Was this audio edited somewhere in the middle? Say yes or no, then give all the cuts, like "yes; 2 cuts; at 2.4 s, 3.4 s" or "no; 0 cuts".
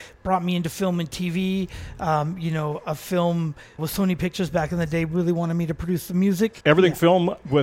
yes; 2 cuts; at 3.8 s, 6.6 s